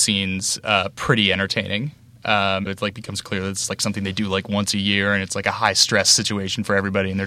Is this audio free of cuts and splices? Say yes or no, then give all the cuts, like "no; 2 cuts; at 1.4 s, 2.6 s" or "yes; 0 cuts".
no; 1 cut; at 2.7 s